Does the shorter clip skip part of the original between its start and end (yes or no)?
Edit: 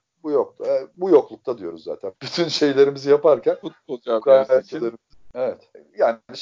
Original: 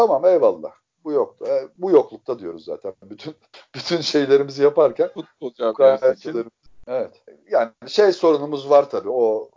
yes